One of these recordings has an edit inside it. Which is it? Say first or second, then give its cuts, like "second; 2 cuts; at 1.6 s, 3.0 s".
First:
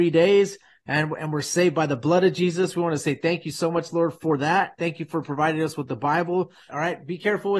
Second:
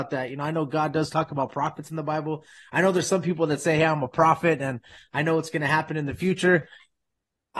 first; 1 cut; at 6.7 s